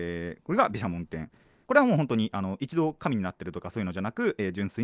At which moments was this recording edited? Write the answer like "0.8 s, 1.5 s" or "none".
1.7 s